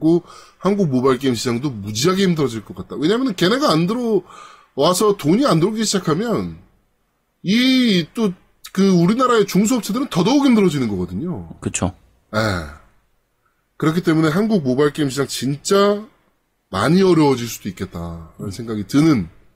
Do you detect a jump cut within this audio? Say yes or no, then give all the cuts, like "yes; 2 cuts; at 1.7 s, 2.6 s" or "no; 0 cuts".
no; 0 cuts